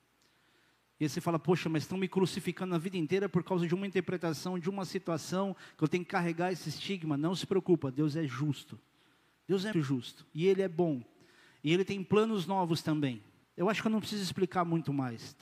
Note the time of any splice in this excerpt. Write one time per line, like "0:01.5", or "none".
0:09.7
0:13.4